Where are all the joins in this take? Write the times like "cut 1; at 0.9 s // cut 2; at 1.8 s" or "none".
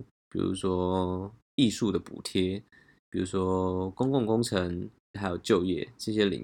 cut 1; at 5.1 s